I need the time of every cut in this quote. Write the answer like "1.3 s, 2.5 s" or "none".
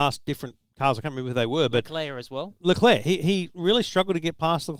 none

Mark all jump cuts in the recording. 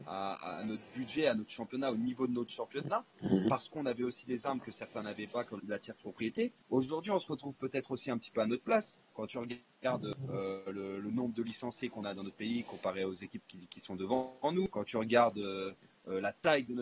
5.6 s

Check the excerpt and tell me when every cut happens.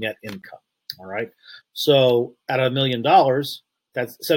1.6 s

